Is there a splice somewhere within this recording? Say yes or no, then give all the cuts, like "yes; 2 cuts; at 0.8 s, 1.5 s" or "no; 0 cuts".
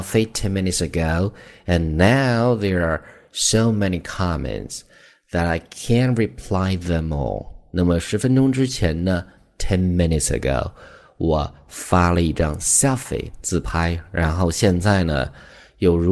no; 0 cuts